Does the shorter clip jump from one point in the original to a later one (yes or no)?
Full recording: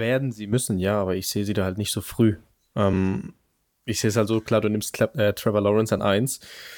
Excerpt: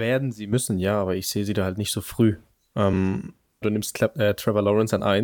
yes